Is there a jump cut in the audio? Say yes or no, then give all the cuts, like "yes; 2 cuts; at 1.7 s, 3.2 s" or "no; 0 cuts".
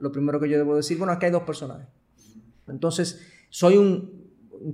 yes; 1 cut; at 2.7 s